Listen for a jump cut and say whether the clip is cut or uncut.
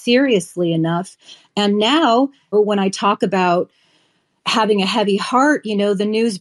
cut